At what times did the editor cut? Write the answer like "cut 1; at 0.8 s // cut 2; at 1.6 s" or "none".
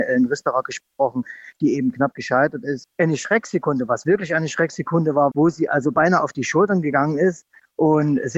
cut 1; at 2.8 s // cut 2; at 5.3 s